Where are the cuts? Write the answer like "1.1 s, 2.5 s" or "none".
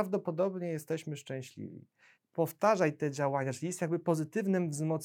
2.2 s